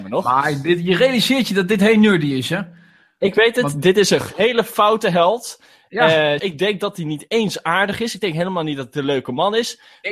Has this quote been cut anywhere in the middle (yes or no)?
yes